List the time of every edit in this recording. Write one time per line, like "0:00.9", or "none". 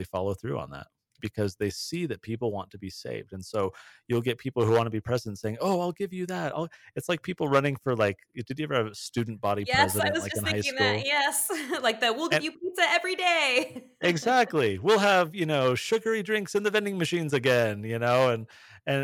0:01.2